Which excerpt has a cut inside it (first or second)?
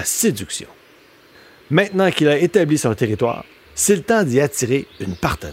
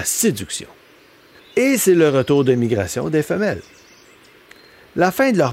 second